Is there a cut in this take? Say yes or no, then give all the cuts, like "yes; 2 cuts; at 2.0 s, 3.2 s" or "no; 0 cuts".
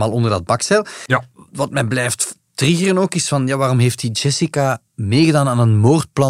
no; 0 cuts